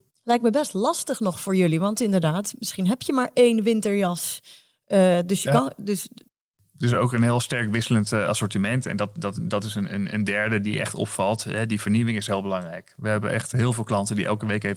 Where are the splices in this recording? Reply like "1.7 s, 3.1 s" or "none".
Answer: none